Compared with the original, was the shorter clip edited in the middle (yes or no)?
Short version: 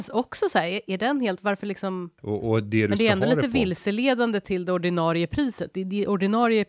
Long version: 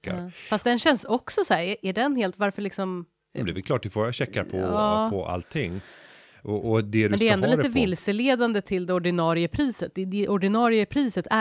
yes